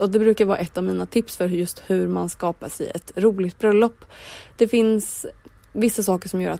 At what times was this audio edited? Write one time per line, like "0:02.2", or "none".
none